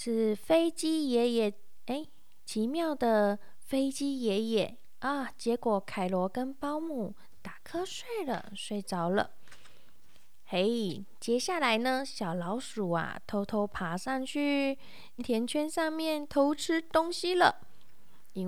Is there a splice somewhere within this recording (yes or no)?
yes